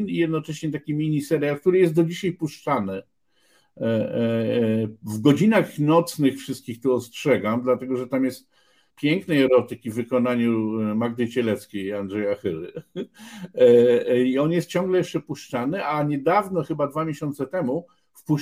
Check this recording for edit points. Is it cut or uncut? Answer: cut